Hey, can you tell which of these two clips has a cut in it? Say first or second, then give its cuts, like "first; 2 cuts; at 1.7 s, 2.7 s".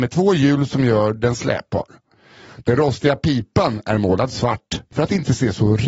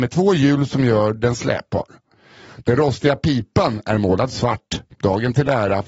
first; 1 cut; at 4.9 s